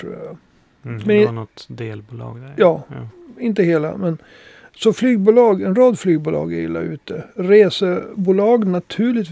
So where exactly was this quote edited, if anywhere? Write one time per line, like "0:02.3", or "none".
none